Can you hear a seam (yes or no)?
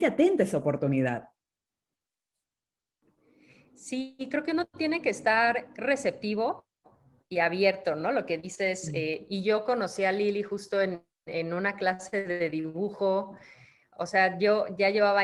no